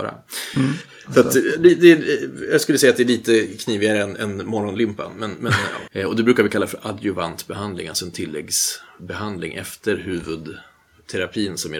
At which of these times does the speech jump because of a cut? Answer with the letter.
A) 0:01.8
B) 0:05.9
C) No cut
B